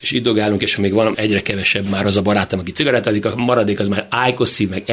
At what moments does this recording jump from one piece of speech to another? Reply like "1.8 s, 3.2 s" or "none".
1.1 s